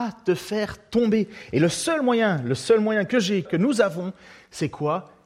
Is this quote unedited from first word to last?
no; 1 cut; at 3.5 s

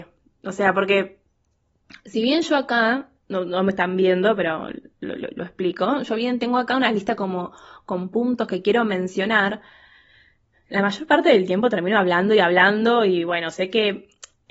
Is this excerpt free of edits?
yes; 0 cuts

